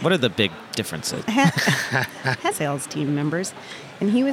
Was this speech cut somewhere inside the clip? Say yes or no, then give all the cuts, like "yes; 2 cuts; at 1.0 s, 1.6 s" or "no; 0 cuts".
yes; 2 cuts; at 1.2 s, 2.5 s